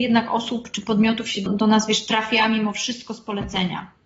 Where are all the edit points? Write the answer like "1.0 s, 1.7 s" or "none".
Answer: 1.5 s